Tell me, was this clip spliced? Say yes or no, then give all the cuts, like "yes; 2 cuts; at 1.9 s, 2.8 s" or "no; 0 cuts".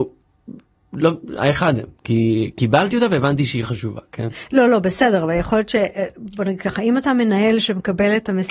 no; 0 cuts